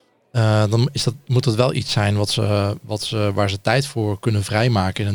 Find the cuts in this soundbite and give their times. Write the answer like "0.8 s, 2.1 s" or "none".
none